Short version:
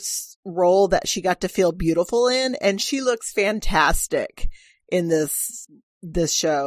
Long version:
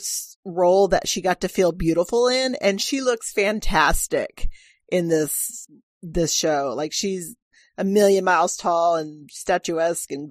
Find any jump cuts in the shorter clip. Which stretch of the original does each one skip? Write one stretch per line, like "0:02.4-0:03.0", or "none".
none